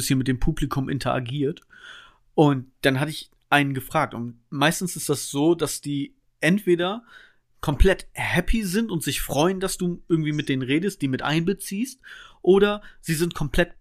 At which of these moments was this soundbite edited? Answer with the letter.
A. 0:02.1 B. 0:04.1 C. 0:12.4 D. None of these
D